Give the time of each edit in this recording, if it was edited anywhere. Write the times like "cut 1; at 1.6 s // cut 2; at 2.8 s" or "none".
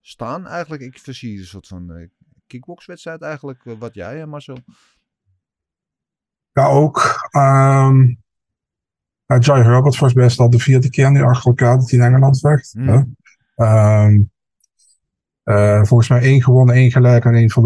none